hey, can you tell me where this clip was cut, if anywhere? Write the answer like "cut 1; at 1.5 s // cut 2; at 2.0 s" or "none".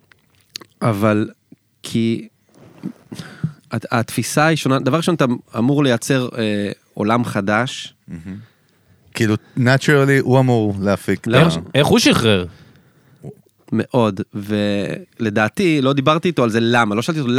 cut 1; at 9.1 s // cut 2; at 13.6 s